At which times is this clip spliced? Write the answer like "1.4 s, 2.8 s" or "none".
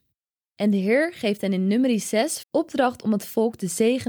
2.4 s